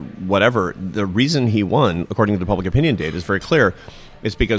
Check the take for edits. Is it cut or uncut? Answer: uncut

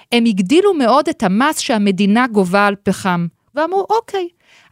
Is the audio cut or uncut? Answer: uncut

